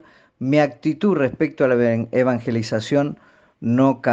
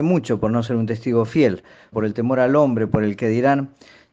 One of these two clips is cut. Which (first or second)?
second